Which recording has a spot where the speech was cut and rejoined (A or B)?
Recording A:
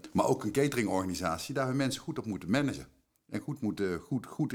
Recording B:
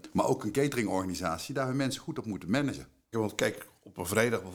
B